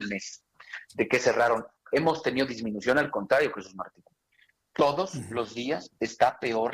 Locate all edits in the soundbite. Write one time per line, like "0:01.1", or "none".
none